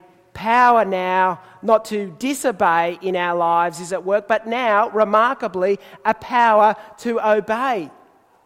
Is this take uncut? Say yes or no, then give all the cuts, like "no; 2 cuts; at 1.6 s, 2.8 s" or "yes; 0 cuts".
yes; 0 cuts